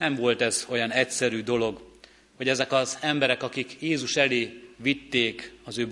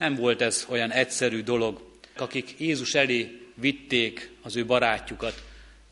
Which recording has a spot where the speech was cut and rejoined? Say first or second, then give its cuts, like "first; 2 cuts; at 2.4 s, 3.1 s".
second; 1 cut; at 2.2 s